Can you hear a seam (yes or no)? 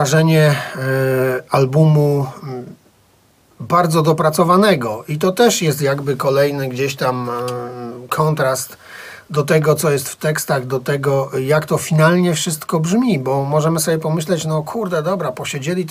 no